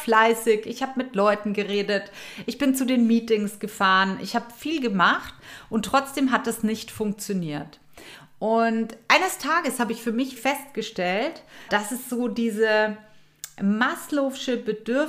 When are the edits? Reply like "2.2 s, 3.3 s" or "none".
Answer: 10.4 s, 11.7 s